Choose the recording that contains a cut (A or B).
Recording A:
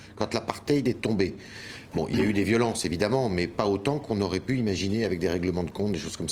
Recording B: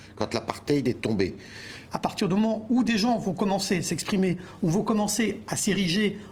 B